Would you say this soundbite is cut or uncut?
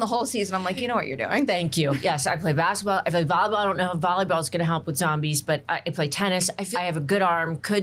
cut